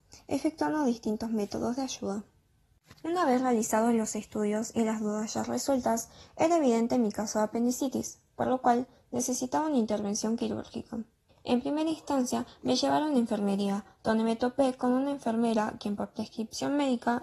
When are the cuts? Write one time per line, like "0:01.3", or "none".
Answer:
0:11.3